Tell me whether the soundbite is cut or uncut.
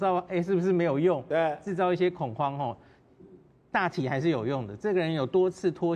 uncut